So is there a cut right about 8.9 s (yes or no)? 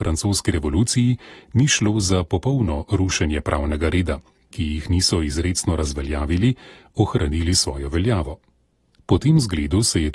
no